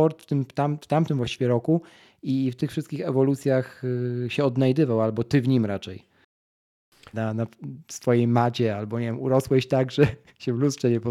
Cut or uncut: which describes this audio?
cut